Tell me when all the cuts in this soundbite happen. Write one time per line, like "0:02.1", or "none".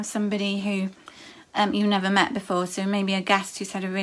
none